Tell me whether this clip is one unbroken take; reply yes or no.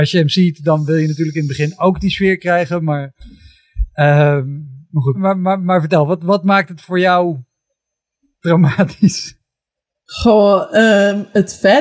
no